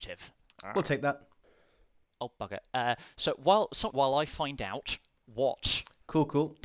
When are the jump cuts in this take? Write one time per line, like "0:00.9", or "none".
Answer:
0:03.9